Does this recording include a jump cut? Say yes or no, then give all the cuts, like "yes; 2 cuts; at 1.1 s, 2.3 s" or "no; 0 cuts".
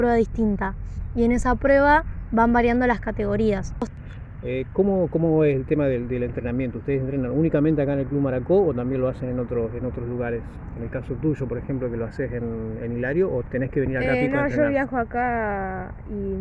no; 0 cuts